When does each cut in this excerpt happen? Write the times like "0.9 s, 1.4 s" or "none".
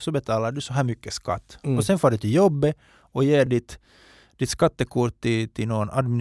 none